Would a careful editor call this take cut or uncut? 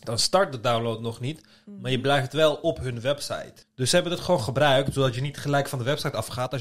cut